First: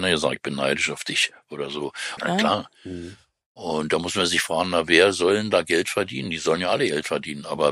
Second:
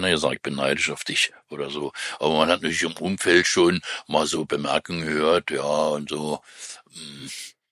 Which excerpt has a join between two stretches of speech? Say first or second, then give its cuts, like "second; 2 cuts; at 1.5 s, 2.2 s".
first; 1 cut; at 2.2 s